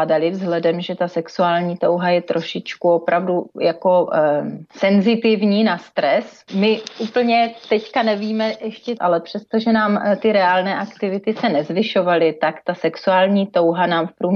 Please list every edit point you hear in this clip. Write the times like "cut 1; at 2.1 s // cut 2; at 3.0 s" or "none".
cut 1; at 6.5 s // cut 2; at 9.0 s